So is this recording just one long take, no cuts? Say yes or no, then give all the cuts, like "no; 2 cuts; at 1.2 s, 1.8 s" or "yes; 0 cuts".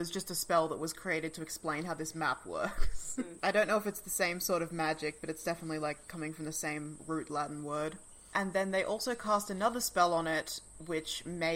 no; 1 cut; at 3.4 s